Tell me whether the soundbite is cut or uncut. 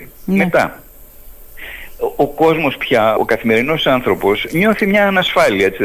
cut